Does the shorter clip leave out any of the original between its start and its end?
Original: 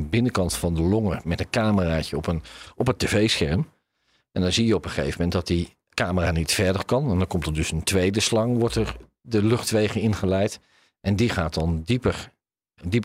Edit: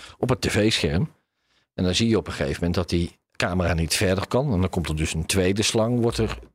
no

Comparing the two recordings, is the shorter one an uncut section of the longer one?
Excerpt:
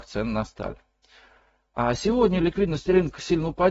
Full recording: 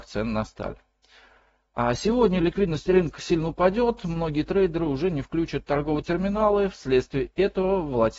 yes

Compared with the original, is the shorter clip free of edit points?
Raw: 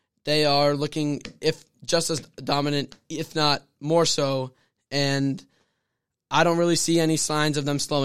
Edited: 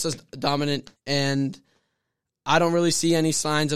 no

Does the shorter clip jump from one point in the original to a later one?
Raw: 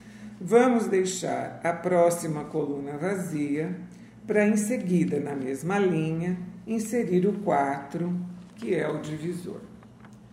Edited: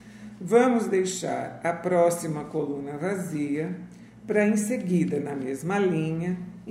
no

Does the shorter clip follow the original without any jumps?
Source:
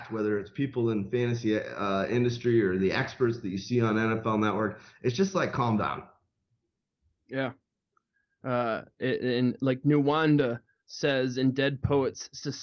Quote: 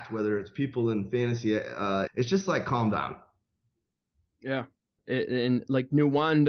no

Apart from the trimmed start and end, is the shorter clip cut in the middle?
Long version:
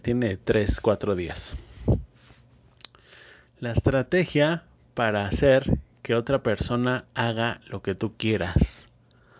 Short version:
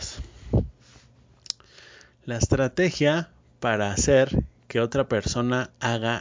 no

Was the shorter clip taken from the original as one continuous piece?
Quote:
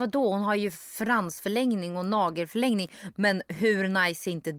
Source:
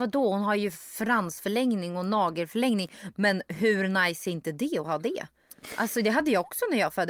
yes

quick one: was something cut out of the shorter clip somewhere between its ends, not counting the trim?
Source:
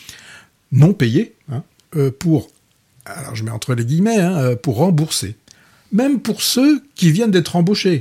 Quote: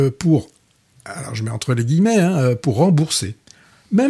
no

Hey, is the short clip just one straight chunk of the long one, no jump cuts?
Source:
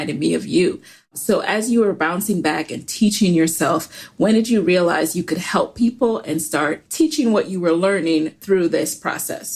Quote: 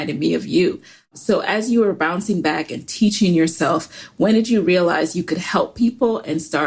yes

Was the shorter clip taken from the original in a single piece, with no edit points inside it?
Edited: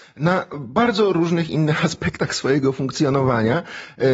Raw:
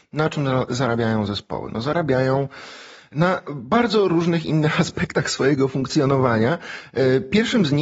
yes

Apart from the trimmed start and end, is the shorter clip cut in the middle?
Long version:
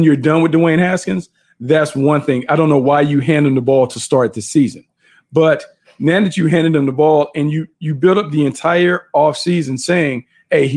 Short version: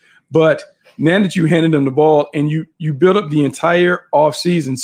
no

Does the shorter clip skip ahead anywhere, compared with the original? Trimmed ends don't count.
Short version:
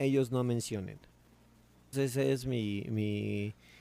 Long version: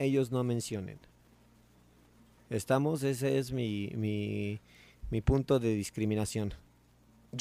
yes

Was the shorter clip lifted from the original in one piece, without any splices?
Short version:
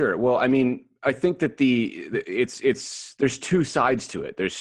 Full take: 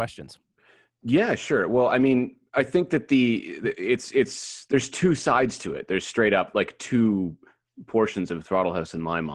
yes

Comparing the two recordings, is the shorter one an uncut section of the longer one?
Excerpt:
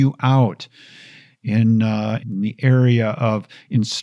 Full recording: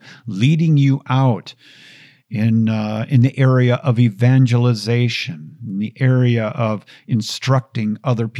no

